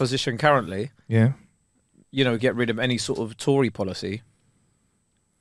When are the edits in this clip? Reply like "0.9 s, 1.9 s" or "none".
2.0 s